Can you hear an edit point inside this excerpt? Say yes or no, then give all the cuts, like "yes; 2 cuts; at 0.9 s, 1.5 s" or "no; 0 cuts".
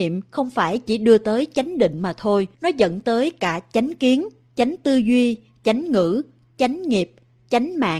yes; 1 cut; at 2.5 s